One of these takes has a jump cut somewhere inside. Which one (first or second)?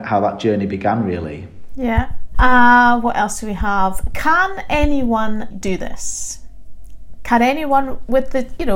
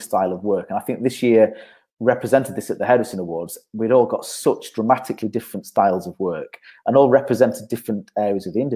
first